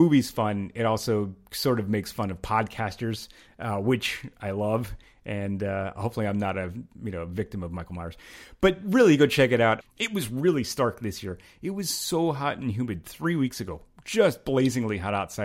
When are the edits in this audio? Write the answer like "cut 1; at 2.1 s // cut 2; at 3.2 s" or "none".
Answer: cut 1; at 9.8 s